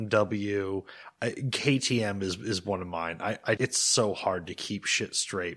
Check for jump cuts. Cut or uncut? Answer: cut